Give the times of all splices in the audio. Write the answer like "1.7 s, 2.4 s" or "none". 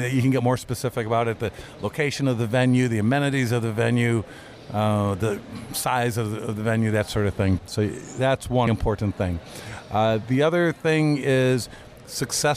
7.6 s, 8.7 s